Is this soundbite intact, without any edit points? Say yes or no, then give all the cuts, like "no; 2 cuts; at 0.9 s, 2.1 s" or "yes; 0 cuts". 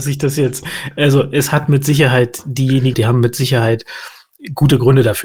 no; 1 cut; at 2.9 s